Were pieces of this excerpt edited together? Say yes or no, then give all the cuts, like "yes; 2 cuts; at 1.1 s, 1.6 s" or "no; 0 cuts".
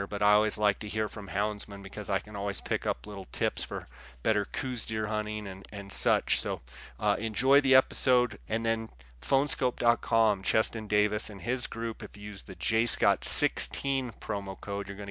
yes; 1 cut; at 8.5 s